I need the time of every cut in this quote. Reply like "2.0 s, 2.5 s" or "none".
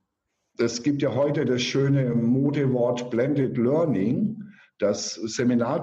none